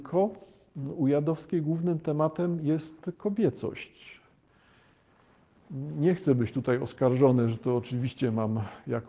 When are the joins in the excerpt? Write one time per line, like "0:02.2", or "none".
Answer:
none